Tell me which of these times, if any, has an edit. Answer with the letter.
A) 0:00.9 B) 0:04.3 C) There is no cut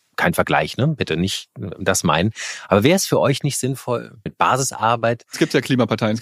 B